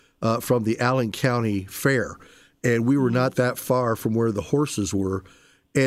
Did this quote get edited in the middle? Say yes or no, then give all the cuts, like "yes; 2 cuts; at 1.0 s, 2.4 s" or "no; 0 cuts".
no; 0 cuts